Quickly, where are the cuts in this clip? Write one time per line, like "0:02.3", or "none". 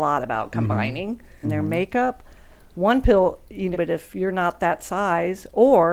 0:01.4
0:03.7